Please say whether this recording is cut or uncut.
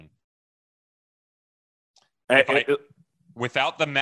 uncut